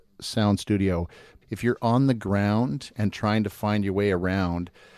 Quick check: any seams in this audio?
yes; 1 cut; at 1.4 s

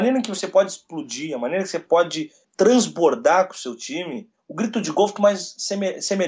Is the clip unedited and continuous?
no; 2 cuts; at 2.4 s, 5.2 s

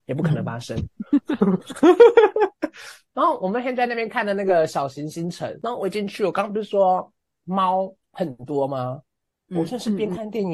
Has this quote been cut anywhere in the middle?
no; 0 cuts

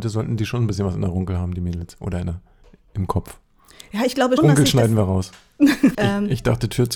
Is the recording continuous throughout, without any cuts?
no; 2 cuts; at 4.4 s, 5.9 s

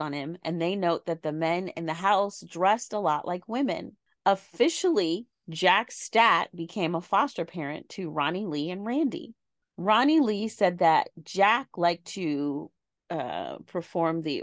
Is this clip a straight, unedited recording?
yes; 0 cuts

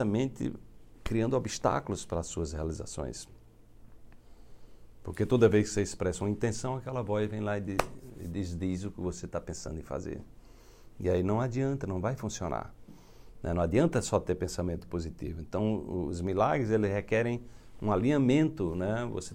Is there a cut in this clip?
no; 0 cuts

